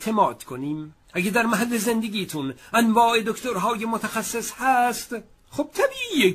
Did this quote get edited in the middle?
yes; 1 cut; at 1.0 s

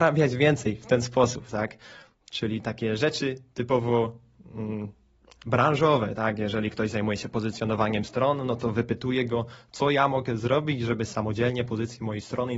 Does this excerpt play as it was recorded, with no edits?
yes; 0 cuts

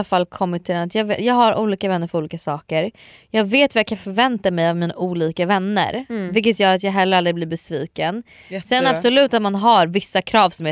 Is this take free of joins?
yes; 0 cuts

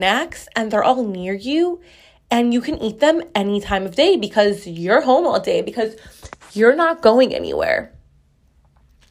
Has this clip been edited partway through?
no; 0 cuts

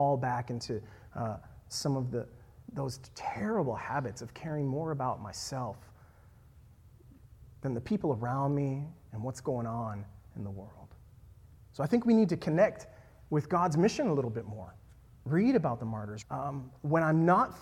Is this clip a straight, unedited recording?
no; 2 cuts; at 15.1 s, 16.2 s

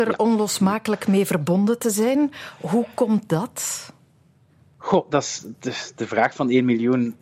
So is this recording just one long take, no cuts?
yes; 0 cuts

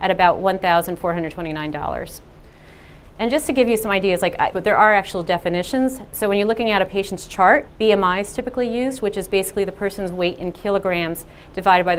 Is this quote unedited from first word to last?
no; 2 cuts; at 4.5 s, 7.7 s

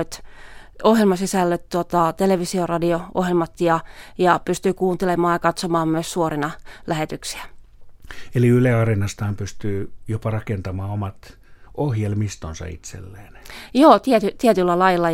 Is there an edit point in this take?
no; 0 cuts

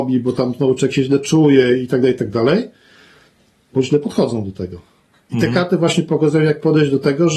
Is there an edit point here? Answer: no; 0 cuts

